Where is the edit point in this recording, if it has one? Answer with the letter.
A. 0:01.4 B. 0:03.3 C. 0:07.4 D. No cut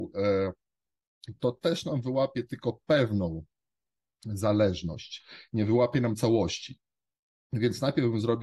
D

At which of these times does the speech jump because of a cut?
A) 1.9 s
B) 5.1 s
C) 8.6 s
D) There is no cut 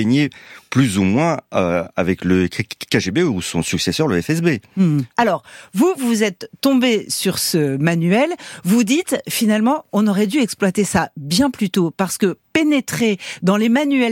B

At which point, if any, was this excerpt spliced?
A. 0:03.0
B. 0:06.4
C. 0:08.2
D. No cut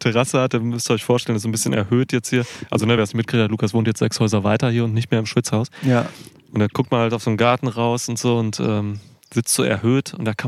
D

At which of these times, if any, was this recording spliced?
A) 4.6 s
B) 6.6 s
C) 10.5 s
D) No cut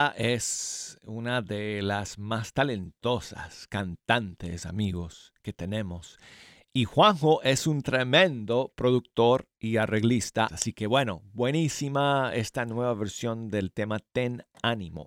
C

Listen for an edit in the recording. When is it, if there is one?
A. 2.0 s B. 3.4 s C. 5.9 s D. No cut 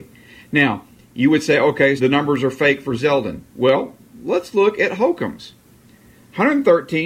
A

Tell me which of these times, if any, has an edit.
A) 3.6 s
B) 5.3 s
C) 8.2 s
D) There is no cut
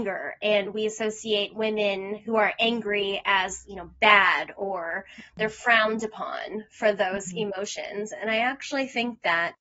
D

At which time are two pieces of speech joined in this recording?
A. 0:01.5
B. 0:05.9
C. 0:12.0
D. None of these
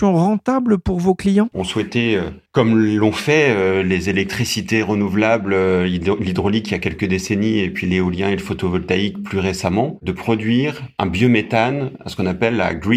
A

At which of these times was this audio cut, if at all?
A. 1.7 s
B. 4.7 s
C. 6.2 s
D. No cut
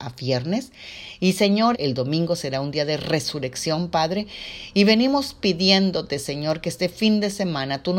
A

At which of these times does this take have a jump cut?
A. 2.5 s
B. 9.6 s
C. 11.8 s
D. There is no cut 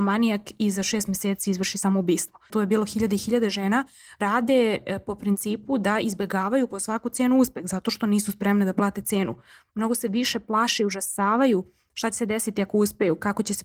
A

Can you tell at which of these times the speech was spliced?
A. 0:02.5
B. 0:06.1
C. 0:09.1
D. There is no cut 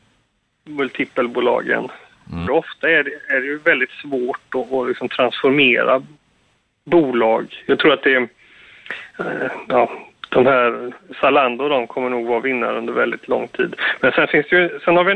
A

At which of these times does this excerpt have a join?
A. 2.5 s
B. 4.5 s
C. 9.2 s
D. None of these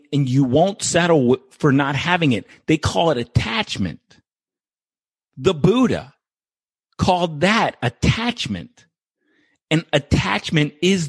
D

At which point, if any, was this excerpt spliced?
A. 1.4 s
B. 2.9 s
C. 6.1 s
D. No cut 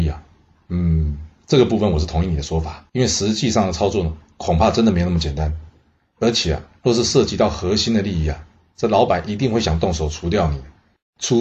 B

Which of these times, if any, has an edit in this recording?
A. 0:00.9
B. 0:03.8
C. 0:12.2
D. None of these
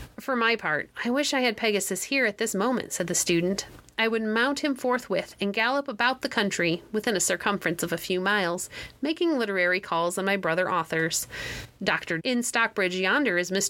C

